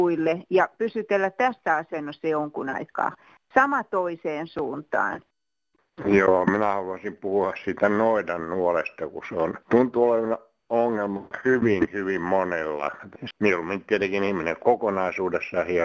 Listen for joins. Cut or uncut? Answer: cut